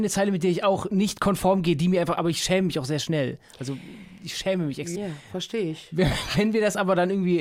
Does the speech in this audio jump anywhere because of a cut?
yes; 1 cut; at 4.9 s

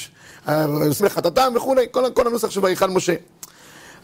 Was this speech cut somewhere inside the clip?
yes; 1 cut; at 1.0 s

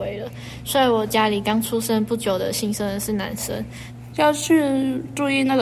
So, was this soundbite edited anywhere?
yes; 1 cut; at 4.1 s

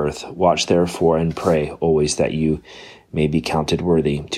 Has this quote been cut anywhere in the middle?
no; 0 cuts

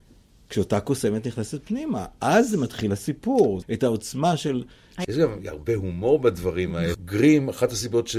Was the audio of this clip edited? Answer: yes; 3 cuts; at 3.6 s, 5.0 s, 6.9 s

